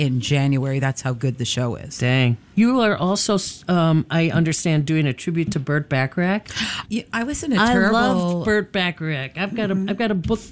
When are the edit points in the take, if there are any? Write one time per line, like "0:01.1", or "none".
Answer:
0:02.5
0:06.8